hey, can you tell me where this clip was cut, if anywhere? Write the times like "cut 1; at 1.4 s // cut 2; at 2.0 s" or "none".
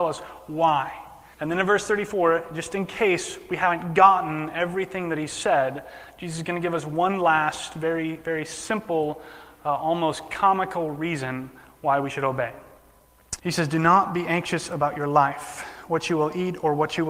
cut 1; at 1.3 s // cut 2; at 13.4 s

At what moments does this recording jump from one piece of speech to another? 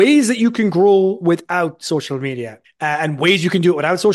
cut 1; at 2.6 s

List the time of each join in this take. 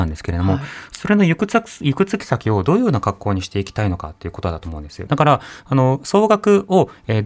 cut 1; at 5.1 s

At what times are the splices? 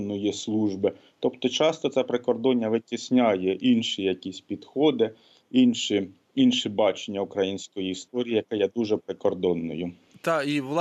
none

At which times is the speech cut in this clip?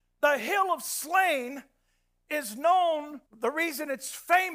cut 1; at 3.3 s

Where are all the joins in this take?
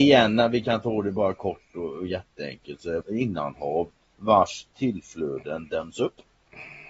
cut 1; at 3.0 s

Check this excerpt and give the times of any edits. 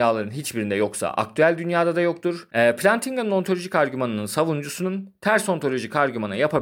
cut 1; at 2.5 s

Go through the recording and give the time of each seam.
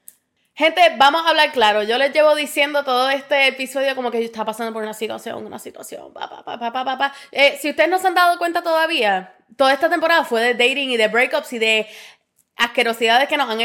none

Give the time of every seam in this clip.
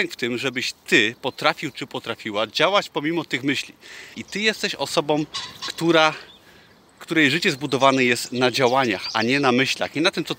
cut 1; at 4.1 s

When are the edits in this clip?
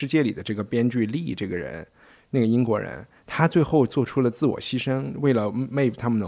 none

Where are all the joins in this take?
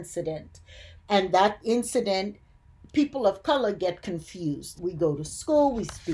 cut 1; at 1.0 s // cut 2; at 4.7 s

